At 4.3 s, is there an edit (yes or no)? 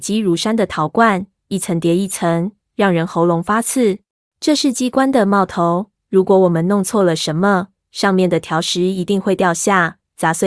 yes